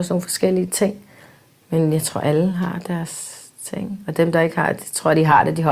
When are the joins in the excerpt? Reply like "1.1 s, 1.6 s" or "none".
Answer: none